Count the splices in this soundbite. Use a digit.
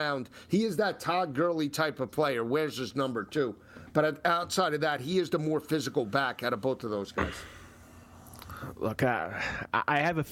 0